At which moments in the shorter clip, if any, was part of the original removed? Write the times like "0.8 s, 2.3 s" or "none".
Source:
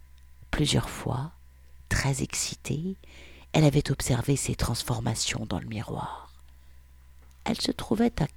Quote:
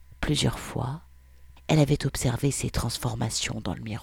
1.6 s